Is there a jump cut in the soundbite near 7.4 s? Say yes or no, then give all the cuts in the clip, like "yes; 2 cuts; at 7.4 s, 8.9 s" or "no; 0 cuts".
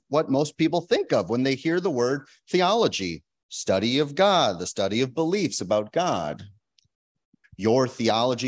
yes; 1 cut; at 7.4 s